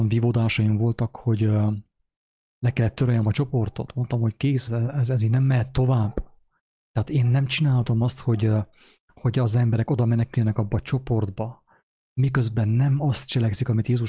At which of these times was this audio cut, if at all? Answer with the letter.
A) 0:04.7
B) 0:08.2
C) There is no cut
A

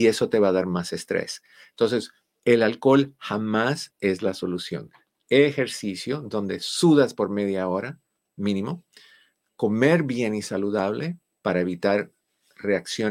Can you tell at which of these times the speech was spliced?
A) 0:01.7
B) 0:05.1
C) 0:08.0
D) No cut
B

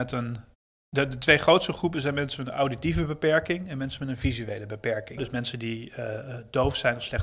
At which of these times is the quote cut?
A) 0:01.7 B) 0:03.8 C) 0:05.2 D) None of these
C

